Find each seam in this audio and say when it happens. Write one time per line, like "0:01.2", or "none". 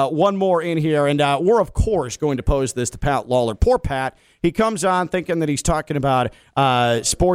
none